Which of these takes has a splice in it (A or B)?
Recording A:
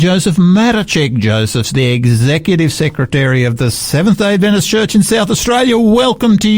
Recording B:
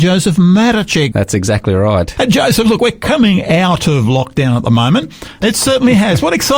B